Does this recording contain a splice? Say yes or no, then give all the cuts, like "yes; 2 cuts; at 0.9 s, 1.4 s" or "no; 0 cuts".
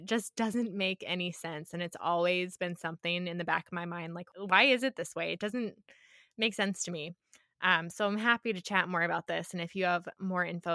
no; 0 cuts